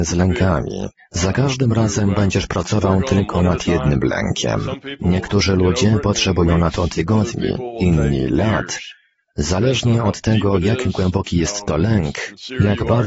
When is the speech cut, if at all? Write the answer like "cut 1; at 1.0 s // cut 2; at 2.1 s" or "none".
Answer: none

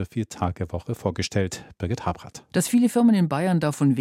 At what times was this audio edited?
cut 1; at 2.5 s

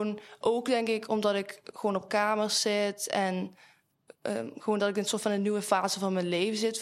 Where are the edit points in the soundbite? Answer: none

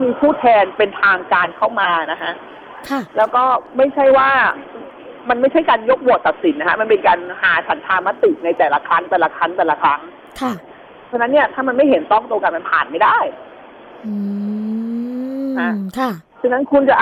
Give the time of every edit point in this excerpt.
none

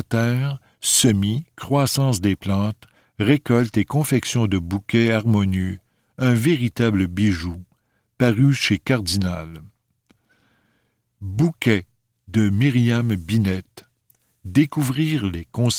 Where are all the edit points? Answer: none

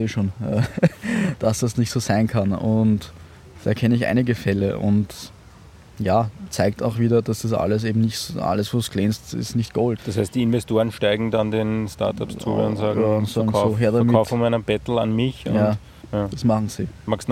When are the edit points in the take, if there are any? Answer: cut 1; at 10.0 s

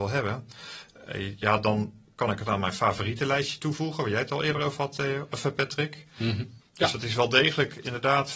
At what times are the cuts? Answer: cut 1; at 6.6 s

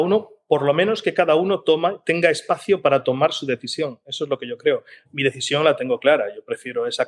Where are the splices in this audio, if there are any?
none

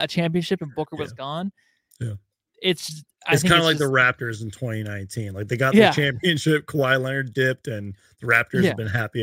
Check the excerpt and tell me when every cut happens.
none

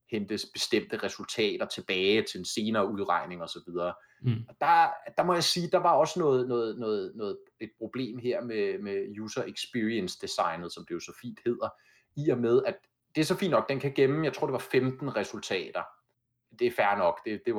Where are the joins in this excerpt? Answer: none

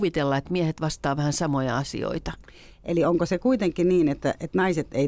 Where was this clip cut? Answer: none

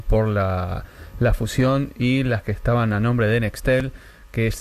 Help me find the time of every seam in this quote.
none

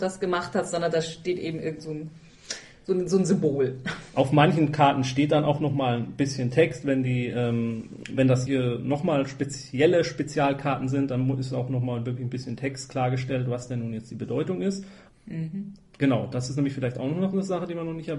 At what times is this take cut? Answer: cut 1; at 8.5 s // cut 2; at 15.1 s

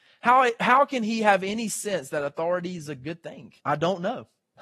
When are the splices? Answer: cut 1; at 3.6 s

